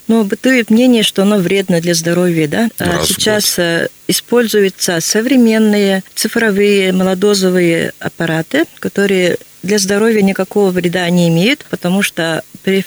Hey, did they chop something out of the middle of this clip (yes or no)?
yes